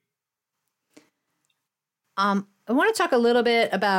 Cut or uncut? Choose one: uncut